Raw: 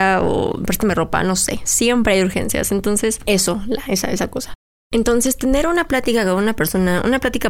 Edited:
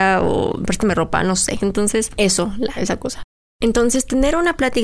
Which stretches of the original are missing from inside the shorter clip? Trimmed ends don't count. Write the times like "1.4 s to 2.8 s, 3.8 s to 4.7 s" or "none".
1.6 s to 2.7 s, 3.8 s to 4.1 s